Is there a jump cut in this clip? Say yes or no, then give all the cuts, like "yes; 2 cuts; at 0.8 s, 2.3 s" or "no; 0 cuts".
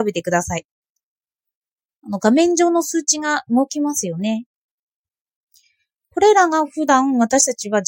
no; 0 cuts